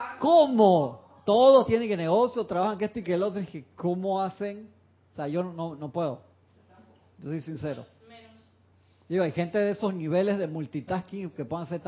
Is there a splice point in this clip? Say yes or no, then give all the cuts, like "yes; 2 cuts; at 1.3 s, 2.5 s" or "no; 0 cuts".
no; 0 cuts